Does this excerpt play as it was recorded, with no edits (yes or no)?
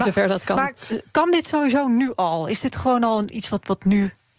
yes